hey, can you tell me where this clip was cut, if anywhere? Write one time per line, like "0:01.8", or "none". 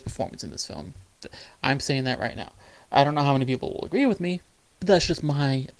none